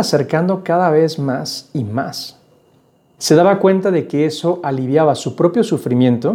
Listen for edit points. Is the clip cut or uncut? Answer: cut